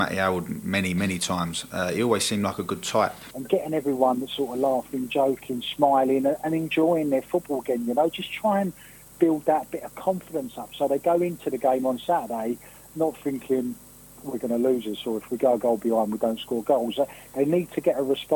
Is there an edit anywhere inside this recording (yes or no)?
yes